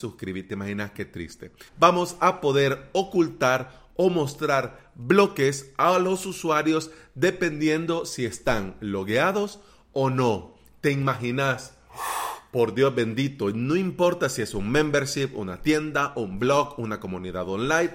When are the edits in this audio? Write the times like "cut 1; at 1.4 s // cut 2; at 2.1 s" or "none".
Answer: cut 1; at 1.7 s